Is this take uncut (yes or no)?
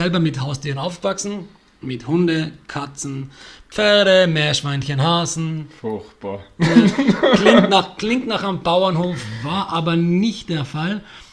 yes